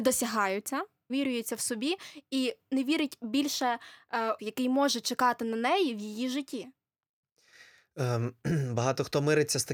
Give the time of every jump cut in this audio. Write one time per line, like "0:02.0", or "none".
0:01.1
0:04.4